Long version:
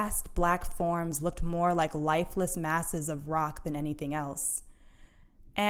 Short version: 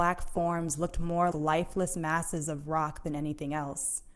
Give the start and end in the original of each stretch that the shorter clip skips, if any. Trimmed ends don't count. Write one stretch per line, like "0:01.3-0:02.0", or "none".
0:01.7-0:01.9